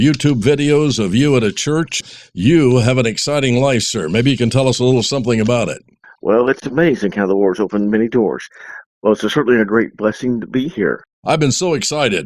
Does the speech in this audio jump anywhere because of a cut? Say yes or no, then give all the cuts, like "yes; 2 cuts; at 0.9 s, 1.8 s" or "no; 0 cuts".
yes; 2 cuts; at 6.6 s, 8.9 s